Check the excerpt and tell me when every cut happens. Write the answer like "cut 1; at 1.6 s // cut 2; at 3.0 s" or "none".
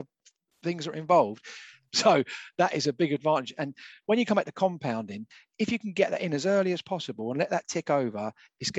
cut 1; at 1.9 s